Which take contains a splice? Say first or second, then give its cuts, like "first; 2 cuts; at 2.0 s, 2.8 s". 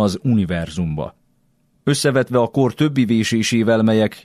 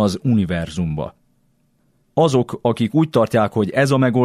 first; 1 cut; at 1.7 s